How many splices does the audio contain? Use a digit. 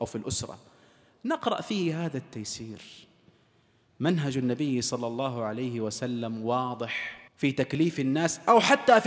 1